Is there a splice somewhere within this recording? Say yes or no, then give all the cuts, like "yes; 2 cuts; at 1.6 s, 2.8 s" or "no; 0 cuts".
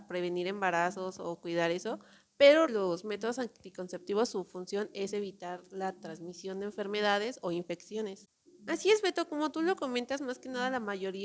yes; 2 cuts; at 2.7 s, 8.5 s